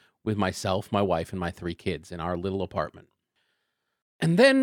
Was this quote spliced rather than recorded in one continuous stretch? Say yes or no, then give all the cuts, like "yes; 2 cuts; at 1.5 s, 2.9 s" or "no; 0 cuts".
no; 0 cuts